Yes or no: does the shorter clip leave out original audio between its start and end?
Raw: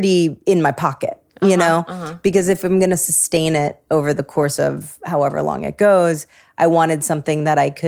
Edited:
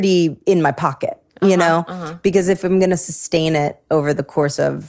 no